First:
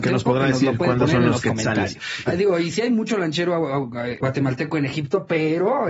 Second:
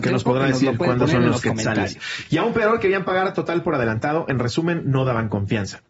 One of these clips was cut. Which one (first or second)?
first